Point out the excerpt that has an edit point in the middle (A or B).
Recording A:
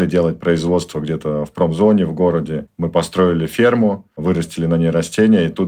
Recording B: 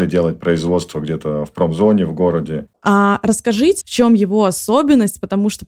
B